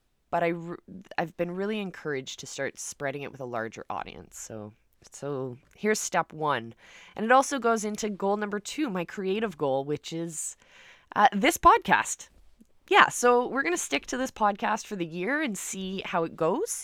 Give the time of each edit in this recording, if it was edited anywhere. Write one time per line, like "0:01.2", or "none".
none